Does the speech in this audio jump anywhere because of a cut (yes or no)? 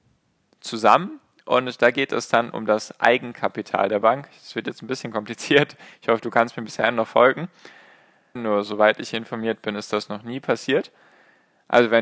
yes